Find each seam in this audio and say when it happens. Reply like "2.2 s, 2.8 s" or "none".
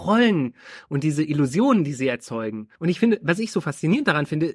2.8 s